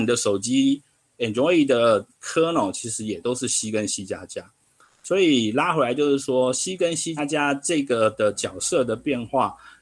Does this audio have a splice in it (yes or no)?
yes